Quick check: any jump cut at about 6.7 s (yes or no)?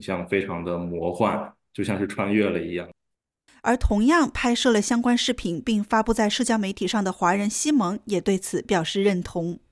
no